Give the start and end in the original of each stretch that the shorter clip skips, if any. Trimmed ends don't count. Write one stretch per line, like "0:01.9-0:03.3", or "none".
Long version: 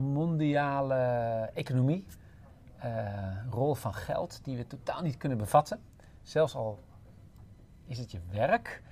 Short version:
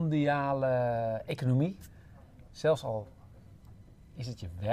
0:02.8-0:06.2